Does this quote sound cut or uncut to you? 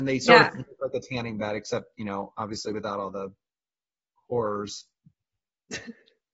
uncut